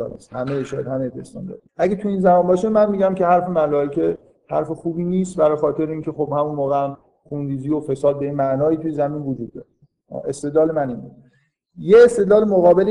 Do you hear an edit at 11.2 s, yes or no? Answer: no